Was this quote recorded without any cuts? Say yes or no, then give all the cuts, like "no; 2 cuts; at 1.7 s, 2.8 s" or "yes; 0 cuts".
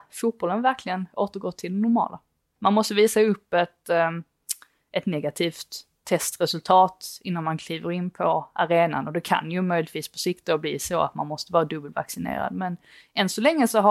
no; 1 cut; at 2.6 s